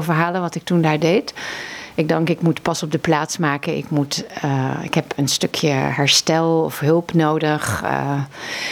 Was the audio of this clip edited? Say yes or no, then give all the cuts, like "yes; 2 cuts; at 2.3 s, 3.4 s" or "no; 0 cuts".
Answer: no; 0 cuts